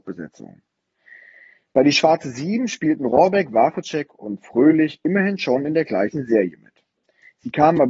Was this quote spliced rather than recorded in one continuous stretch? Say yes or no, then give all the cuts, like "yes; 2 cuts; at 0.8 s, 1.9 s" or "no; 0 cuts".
no; 0 cuts